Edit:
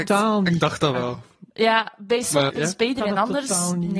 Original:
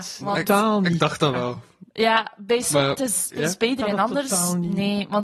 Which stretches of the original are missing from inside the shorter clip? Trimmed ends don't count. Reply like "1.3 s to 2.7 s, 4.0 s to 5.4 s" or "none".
2.9 s to 3.3 s